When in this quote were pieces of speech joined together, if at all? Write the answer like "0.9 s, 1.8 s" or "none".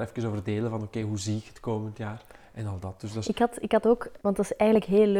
4.2 s